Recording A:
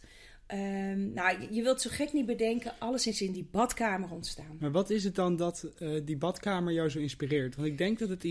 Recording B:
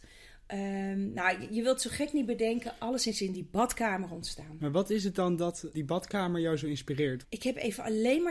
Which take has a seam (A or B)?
B